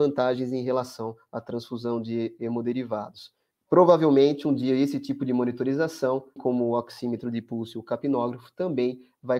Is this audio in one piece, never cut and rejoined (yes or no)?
no